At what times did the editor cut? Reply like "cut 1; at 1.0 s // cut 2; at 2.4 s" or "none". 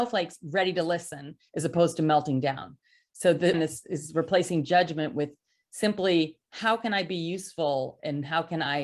cut 1; at 3.5 s